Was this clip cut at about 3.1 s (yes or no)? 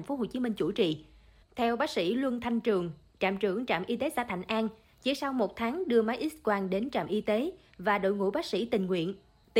no